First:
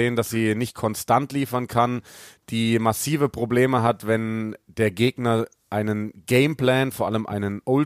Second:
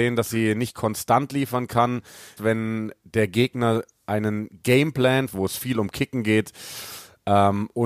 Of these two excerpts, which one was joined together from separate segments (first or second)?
second